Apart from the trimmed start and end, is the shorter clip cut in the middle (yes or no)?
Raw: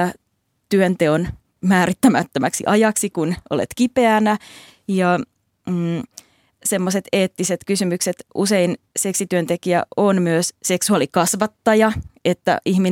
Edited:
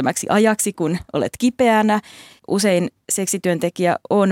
yes